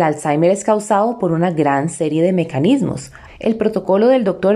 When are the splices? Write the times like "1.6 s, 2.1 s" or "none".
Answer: 3.3 s

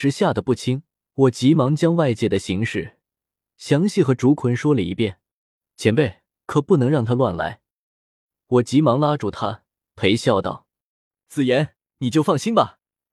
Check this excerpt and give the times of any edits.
1.0 s, 6.3 s

